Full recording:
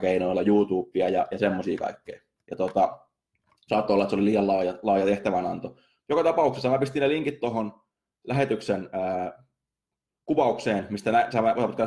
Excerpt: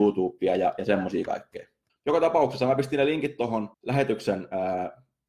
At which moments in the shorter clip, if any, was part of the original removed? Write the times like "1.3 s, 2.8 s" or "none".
1.9 s, 3.7 s